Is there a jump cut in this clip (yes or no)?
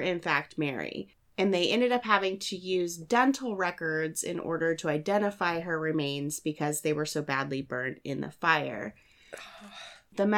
no